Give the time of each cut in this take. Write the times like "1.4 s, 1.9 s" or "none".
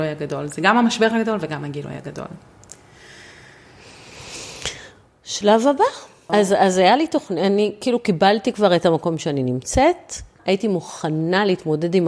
6.3 s, 10.4 s